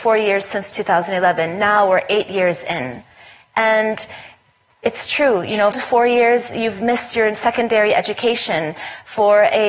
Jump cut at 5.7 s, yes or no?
yes